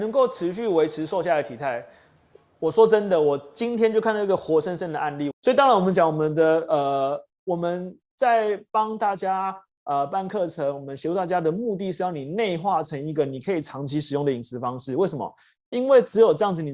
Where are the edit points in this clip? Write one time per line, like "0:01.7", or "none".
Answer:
0:05.3